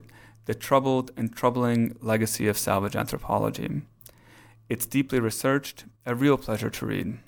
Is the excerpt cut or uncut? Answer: cut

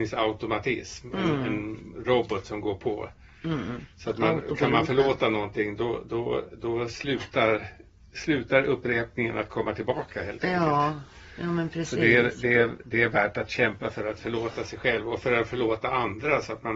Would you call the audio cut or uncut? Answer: uncut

